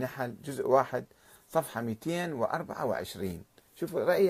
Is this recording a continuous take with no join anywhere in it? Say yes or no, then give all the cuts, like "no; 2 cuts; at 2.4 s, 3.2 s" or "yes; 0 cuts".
yes; 0 cuts